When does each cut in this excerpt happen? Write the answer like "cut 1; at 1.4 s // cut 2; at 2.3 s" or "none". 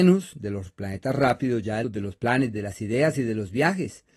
cut 1; at 1.8 s